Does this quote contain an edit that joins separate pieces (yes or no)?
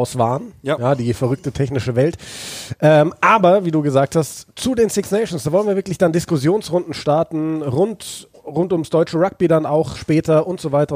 yes